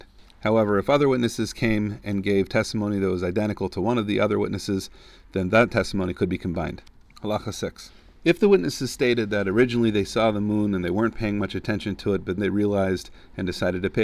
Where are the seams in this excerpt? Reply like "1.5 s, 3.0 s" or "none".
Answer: 12.4 s